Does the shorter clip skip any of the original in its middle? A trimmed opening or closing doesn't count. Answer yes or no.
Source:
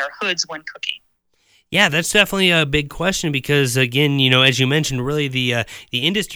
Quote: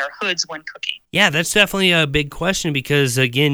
yes